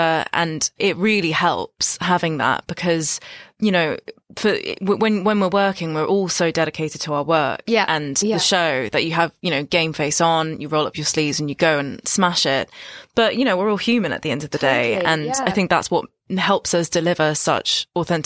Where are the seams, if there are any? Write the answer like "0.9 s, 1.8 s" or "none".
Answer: none